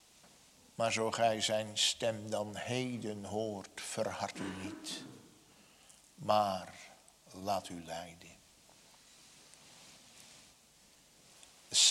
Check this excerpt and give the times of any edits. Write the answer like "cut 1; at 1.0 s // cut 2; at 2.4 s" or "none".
none